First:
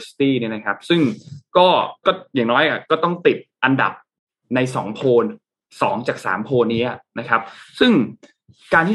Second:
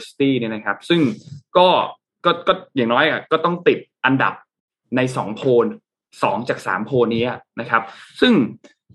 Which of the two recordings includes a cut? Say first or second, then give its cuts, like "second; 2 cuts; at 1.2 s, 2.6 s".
first; 1 cut; at 2.0 s